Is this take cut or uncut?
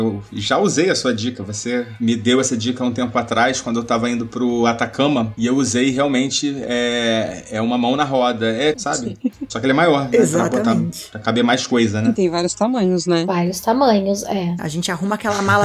cut